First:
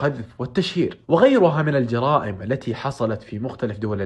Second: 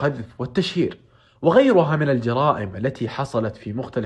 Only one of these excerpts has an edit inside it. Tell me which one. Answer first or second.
first